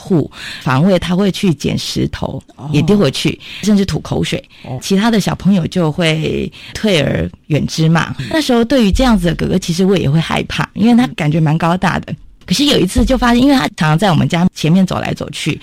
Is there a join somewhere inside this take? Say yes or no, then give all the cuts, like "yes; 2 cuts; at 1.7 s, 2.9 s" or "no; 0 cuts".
no; 0 cuts